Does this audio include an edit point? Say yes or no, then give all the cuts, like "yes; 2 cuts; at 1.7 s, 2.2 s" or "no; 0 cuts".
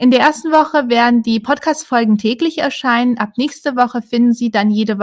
no; 0 cuts